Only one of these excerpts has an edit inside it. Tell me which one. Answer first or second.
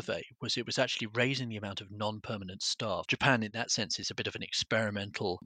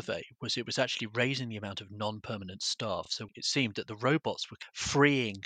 first